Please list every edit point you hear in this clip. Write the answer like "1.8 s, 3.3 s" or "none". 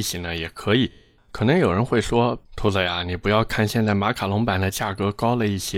1.2 s